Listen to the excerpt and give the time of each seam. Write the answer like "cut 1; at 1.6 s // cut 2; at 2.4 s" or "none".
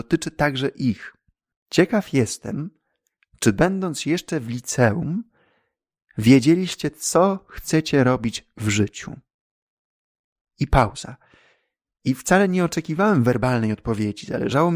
cut 1; at 1.5 s